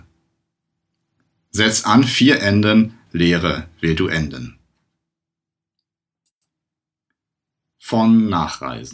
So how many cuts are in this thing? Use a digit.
1